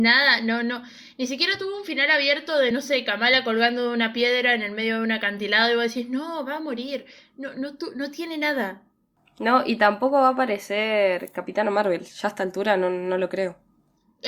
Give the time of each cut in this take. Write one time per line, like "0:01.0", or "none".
none